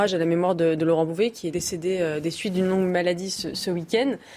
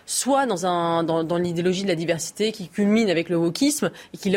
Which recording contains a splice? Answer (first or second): first